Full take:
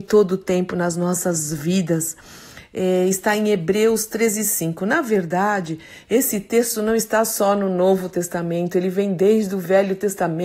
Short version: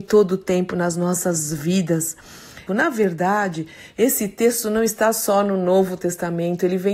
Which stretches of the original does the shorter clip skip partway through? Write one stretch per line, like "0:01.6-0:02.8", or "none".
0:02.7-0:04.8